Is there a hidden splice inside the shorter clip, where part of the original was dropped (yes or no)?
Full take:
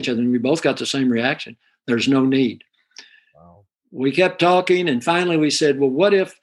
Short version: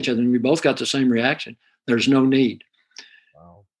no